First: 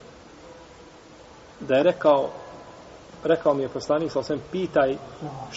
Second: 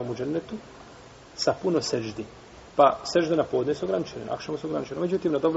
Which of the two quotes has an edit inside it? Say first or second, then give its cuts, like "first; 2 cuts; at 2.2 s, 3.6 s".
second; 2 cuts; at 2.7 s, 4.2 s